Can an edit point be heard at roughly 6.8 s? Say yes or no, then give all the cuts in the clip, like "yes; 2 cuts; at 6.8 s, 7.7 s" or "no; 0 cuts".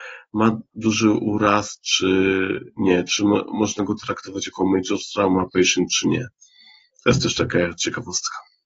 no; 0 cuts